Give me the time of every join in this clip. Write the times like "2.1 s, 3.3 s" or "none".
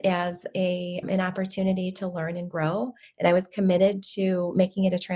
1.0 s